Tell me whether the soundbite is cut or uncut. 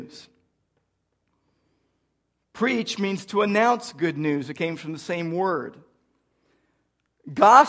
uncut